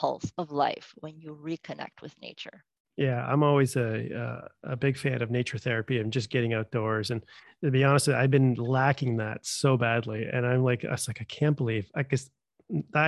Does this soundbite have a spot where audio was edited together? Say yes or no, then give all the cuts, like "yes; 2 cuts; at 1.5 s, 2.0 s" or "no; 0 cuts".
no; 0 cuts